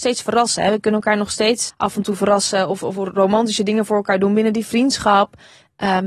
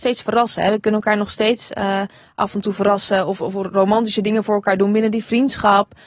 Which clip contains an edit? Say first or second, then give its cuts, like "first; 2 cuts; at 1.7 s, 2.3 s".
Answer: first; 1 cut; at 1.7 s